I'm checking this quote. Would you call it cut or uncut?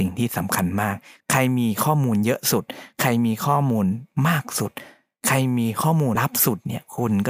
cut